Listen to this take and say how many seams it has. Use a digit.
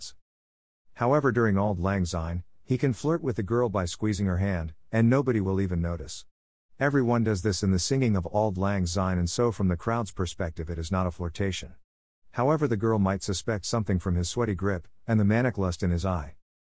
0